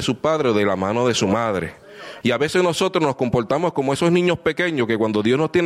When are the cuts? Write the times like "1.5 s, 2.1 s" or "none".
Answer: 2.2 s